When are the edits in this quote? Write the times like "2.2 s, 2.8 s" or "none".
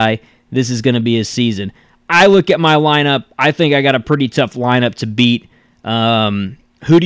none